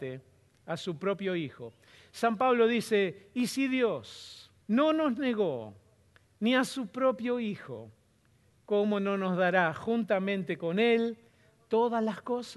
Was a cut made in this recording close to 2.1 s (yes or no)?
no